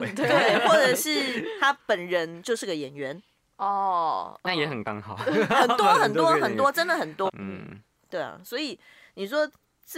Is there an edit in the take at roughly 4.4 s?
no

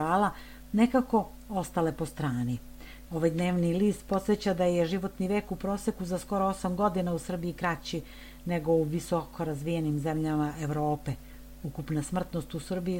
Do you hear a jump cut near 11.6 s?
no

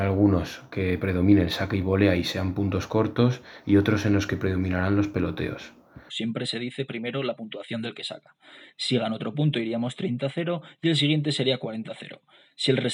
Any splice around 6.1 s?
yes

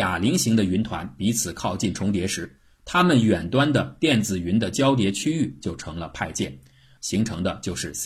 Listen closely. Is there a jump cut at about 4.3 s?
no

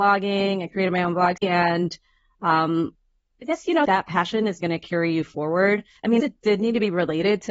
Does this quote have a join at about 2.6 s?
no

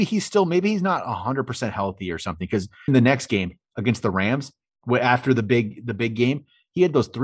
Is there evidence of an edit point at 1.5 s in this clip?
no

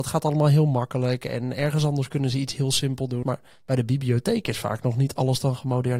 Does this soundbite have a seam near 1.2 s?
no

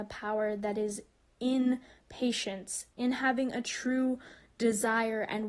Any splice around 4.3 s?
no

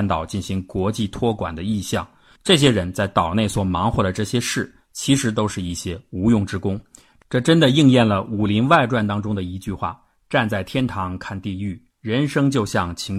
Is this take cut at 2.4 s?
no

